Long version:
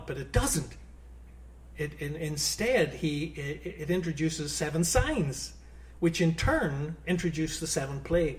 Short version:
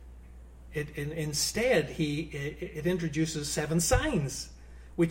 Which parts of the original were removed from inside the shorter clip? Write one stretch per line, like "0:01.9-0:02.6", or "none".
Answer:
none